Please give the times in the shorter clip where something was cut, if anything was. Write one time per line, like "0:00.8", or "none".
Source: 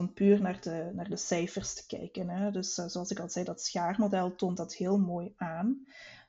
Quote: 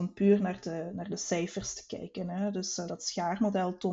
0:02.9